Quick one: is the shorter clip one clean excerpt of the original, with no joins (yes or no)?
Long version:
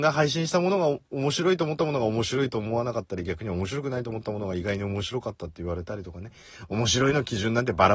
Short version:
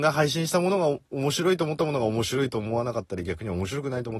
yes